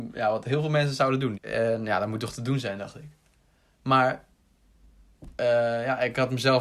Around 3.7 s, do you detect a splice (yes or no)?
yes